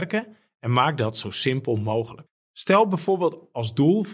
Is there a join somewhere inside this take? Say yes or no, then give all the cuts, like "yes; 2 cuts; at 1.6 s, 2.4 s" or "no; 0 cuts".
no; 0 cuts